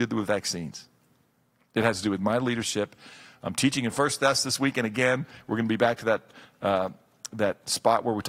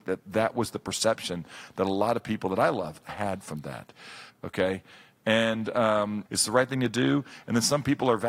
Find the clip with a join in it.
second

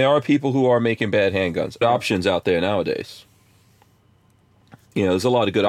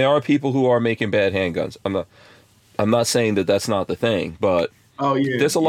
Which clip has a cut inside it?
first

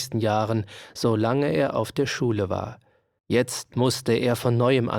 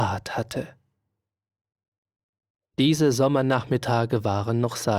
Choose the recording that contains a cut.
first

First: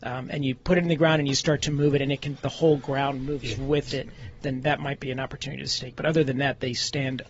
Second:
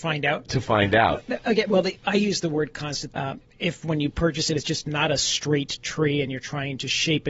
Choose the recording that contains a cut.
second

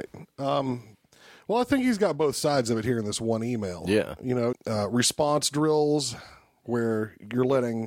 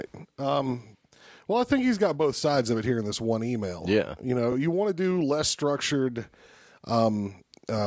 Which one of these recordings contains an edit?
first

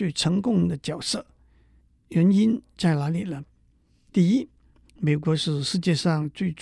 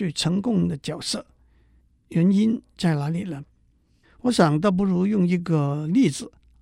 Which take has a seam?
second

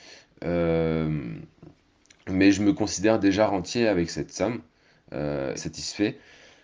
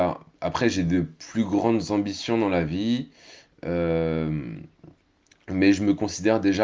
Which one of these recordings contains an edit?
first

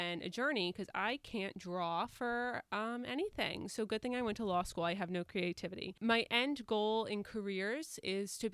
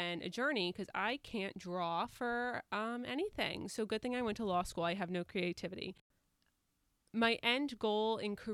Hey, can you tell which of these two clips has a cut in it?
first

